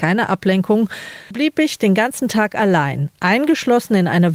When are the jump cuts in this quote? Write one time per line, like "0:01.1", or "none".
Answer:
0:01.3

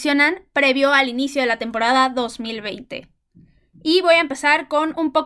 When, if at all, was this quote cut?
none

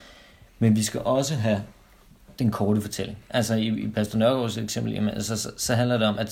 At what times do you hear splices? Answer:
none

